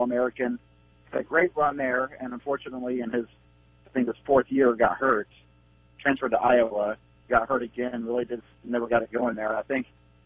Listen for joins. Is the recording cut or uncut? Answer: uncut